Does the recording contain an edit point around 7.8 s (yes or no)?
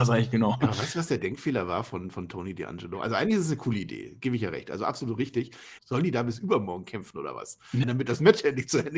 yes